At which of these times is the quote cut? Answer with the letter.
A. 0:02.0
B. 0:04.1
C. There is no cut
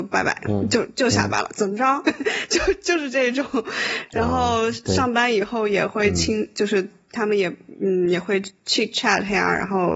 A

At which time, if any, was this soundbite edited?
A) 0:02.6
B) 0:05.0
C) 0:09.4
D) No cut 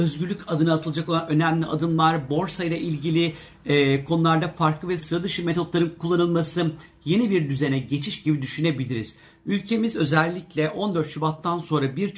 B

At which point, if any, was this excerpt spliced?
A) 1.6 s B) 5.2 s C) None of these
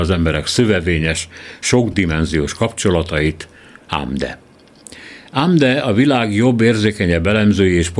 C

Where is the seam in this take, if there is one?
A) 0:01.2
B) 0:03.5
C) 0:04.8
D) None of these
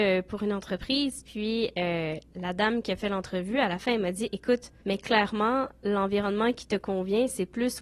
C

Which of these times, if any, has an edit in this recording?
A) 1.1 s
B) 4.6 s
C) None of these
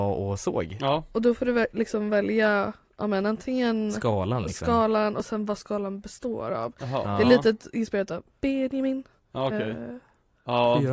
C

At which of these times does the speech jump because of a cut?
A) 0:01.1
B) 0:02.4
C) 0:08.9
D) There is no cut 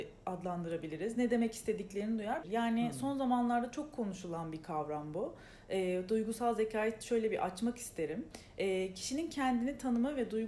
B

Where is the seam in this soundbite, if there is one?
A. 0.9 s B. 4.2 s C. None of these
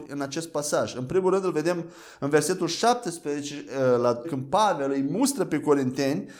B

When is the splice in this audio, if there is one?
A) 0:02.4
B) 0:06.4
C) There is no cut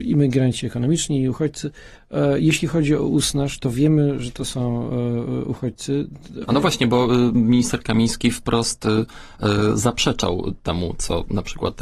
B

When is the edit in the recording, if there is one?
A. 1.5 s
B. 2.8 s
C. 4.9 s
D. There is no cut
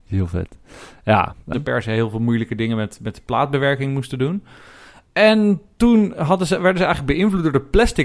A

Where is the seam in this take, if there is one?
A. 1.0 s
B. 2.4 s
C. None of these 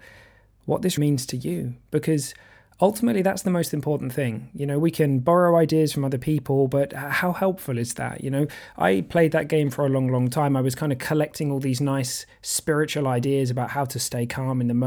A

